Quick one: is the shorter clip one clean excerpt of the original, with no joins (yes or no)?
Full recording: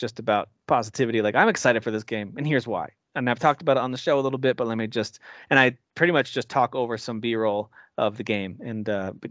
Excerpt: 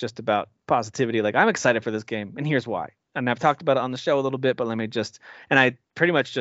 yes